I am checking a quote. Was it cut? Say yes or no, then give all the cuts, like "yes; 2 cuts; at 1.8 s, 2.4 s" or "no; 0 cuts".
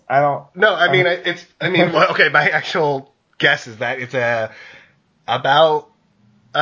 no; 0 cuts